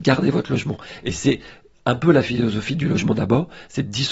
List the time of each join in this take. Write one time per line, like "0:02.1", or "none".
0:01.0